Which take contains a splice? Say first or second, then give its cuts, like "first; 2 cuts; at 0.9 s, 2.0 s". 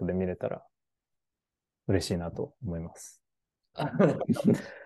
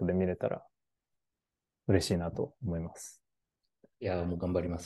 first; 1 cut; at 3.7 s